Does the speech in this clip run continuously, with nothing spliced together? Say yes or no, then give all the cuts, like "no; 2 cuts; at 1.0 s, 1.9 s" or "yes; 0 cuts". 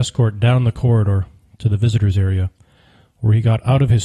yes; 0 cuts